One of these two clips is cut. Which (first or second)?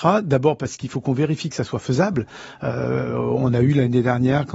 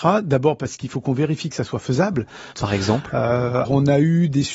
second